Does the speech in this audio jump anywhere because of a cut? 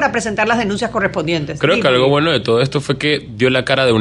no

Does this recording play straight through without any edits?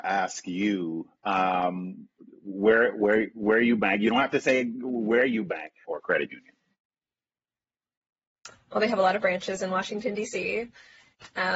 no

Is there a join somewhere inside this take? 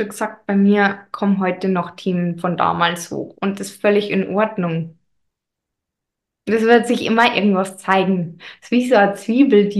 no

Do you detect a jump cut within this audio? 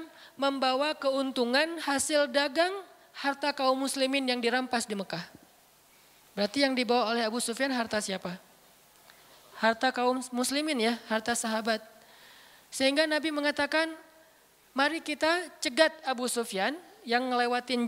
no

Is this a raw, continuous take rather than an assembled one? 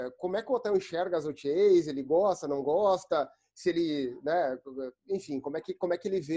yes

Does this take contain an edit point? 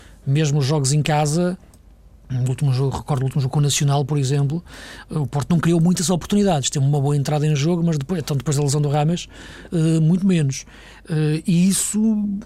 no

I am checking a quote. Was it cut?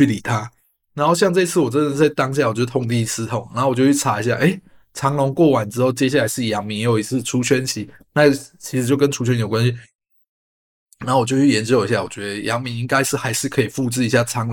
no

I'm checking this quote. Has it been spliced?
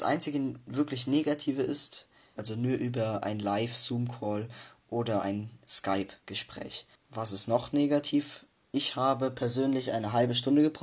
yes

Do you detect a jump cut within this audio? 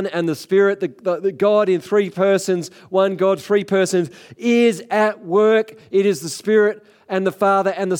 no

